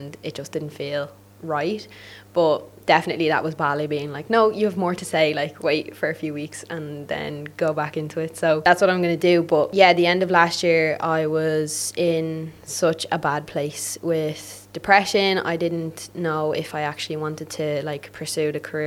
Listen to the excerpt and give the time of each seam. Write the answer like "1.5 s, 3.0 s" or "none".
none

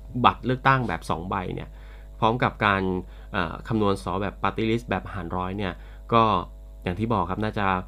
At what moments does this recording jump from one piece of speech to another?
4.0 s

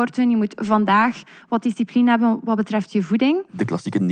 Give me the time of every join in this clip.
none

